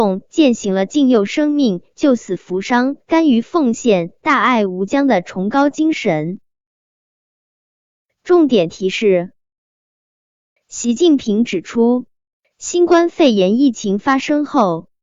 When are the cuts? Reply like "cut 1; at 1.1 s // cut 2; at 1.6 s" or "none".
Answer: cut 1; at 10.6 s